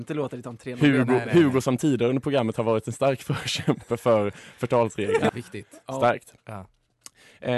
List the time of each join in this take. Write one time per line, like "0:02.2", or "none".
0:05.3